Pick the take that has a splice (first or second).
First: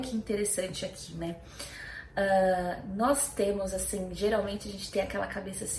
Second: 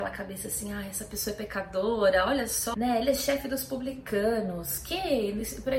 second